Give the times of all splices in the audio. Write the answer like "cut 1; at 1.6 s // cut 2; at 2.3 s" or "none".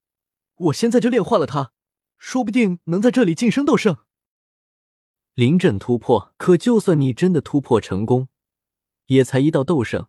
cut 1; at 6.3 s